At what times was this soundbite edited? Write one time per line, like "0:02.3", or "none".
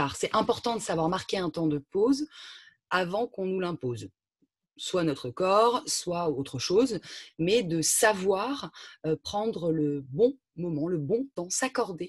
none